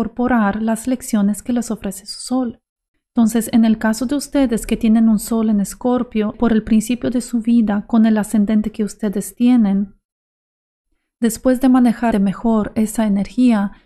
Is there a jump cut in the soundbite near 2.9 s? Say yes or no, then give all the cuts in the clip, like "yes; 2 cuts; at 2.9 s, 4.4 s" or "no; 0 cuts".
yes; 3 cuts; at 2.9 s, 6.3 s, 12.1 s